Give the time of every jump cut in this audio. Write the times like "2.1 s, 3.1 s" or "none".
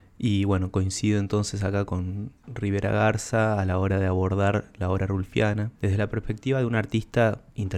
1.9 s, 5.7 s